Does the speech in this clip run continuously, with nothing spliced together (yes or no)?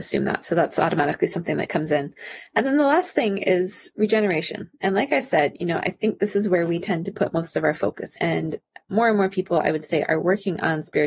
no